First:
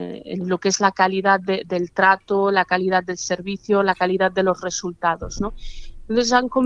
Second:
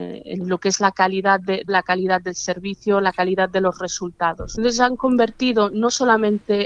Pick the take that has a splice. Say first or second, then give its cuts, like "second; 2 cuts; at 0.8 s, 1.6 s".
second; 2 cuts; at 1.7 s, 4.5 s